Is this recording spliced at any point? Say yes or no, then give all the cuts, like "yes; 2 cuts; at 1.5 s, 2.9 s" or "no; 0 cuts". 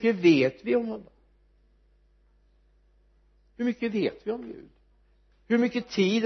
no; 0 cuts